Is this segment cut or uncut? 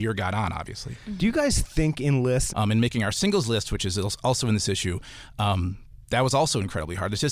cut